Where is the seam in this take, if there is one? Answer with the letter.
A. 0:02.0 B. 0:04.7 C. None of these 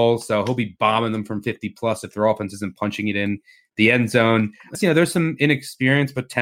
B